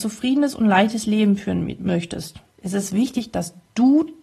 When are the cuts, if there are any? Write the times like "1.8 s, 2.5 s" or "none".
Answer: 2.5 s

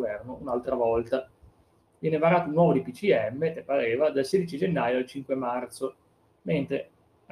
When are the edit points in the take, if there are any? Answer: none

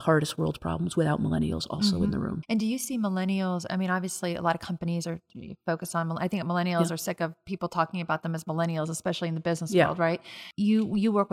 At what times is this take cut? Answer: 2.4 s

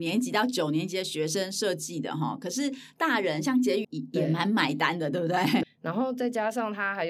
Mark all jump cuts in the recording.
3.8 s, 5.6 s

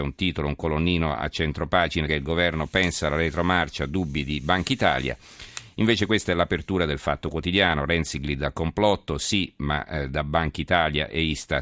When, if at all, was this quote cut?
2.1 s

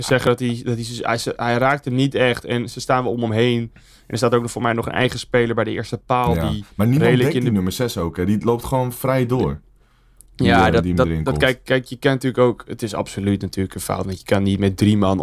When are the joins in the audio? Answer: none

